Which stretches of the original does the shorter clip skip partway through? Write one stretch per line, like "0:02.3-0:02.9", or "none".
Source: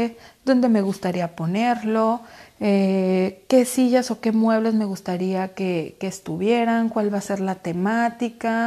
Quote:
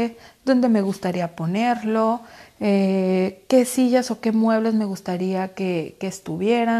none